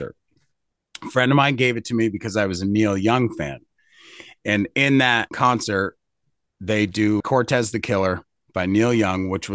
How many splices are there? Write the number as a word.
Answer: two